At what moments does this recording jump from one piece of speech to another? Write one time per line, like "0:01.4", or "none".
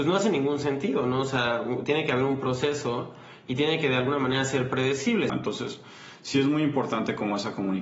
0:05.3